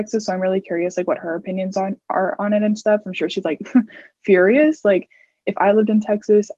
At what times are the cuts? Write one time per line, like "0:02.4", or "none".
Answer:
none